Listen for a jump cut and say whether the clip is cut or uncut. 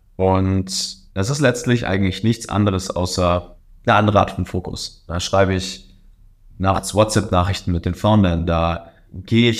cut